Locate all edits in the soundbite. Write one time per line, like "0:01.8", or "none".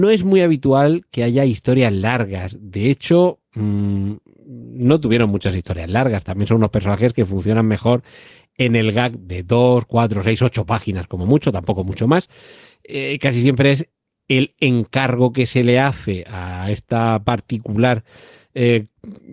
none